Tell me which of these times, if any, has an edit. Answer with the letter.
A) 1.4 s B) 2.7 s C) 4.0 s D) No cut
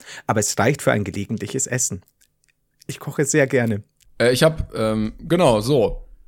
C